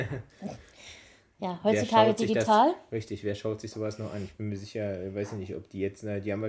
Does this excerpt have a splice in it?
no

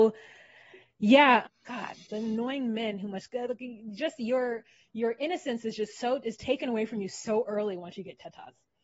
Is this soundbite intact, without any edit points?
no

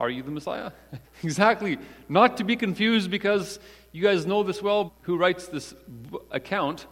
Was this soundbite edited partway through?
yes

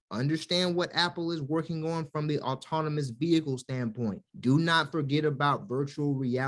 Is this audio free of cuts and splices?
no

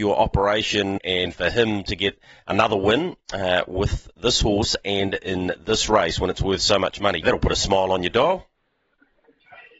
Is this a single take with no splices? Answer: no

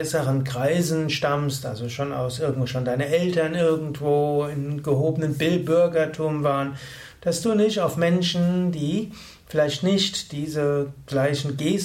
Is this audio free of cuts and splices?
yes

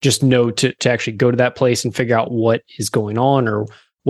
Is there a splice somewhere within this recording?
no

